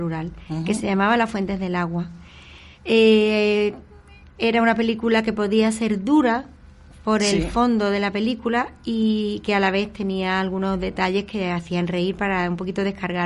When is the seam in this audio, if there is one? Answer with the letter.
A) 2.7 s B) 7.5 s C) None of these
A